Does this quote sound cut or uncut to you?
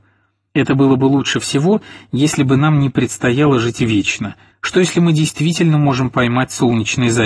cut